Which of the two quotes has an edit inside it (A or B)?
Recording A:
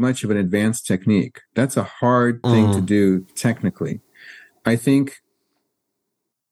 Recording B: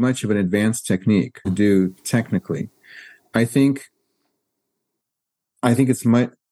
B